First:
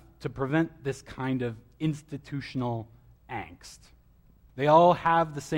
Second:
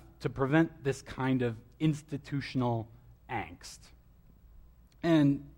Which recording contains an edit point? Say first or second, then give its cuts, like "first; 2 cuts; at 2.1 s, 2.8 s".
first; 1 cut; at 4.5 s